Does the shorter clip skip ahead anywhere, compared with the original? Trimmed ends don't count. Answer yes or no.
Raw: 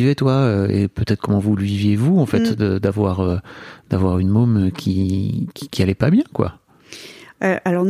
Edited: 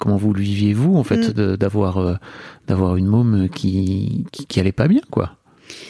no